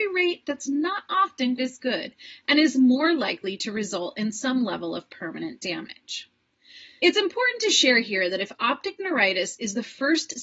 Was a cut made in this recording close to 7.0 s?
yes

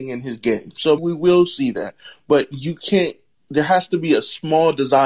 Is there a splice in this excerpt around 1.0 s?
yes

